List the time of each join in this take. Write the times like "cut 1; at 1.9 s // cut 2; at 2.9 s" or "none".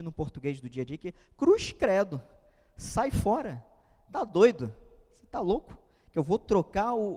none